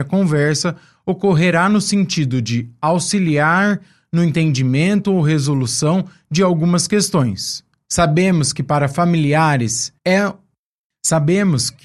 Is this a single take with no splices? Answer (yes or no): no